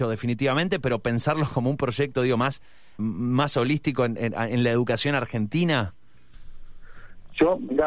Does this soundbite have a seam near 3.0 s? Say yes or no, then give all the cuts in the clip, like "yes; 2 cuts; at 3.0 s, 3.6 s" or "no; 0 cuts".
yes; 1 cut; at 3.0 s